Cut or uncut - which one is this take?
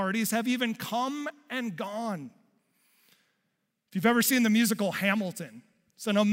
uncut